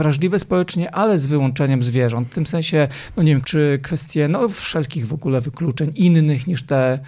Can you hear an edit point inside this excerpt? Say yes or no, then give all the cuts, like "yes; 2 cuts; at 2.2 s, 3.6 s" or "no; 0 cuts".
yes; 1 cut; at 3.4 s